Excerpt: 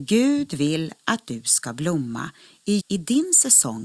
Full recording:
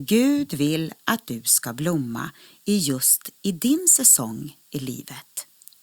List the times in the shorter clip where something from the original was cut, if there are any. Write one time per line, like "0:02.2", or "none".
0:02.8